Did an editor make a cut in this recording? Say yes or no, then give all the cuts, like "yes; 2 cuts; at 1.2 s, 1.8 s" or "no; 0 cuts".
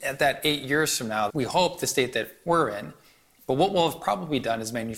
yes; 1 cut; at 1.3 s